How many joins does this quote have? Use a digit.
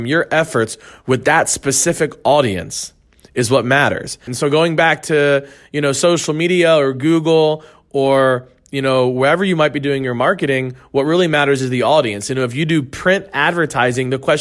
1